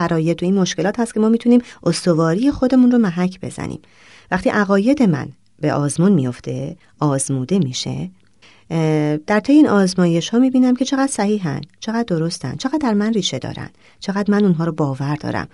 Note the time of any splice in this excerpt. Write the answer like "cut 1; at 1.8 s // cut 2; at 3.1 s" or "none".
none

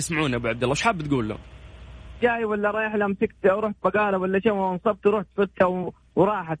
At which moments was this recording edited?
cut 1; at 2.2 s

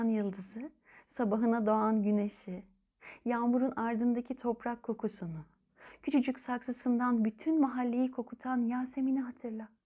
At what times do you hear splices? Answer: none

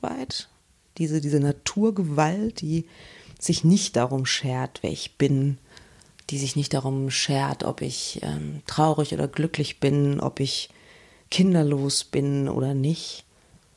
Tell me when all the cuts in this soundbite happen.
none

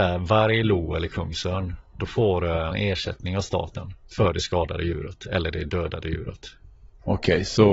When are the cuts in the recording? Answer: cut 1; at 2.7 s // cut 2; at 4.0 s

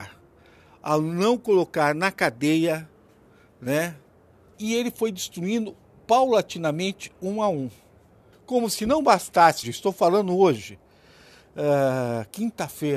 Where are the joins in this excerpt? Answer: cut 1; at 4.5 s // cut 2; at 8.3 s // cut 3; at 9.6 s

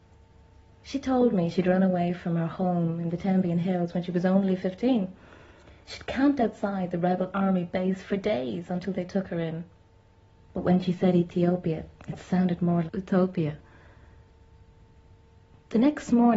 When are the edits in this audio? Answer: cut 1; at 10.4 s // cut 2; at 12.9 s

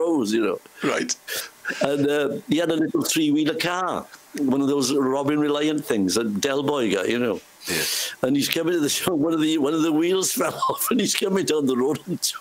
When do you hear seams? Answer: none

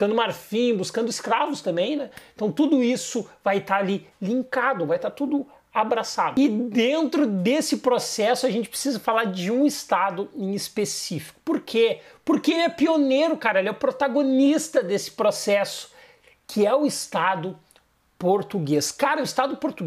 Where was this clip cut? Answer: none

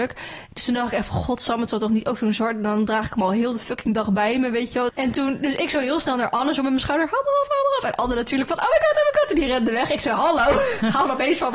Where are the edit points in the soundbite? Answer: cut 1; at 4.9 s

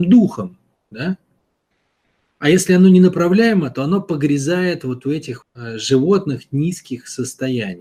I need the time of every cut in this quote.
cut 1; at 5.4 s

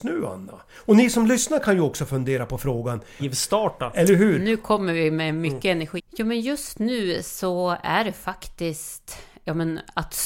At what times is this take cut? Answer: cut 1; at 3.2 s // cut 2; at 6.0 s

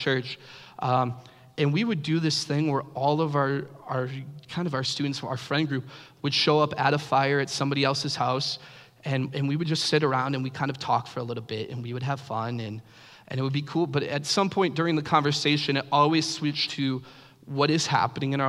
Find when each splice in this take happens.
none

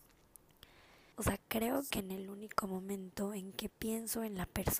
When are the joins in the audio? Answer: cut 1; at 1.1 s

